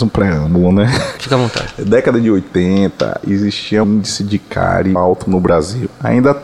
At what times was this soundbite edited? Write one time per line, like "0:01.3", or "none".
0:01.2
0:03.8
0:05.0